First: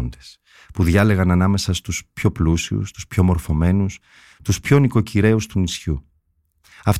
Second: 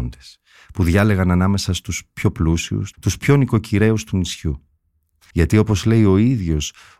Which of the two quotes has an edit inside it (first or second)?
second